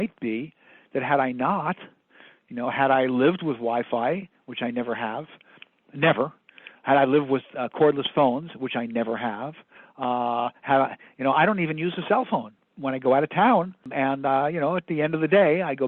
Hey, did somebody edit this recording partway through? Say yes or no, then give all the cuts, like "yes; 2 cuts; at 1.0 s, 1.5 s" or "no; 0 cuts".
yes; 2 cuts; at 12.6 s, 13.8 s